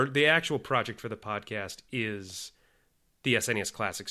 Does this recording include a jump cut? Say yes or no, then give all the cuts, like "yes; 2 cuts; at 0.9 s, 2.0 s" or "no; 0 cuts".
no; 0 cuts